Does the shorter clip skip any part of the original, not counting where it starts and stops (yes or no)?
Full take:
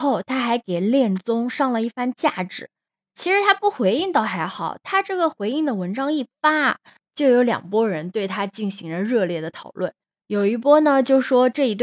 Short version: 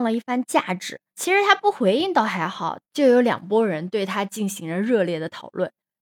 yes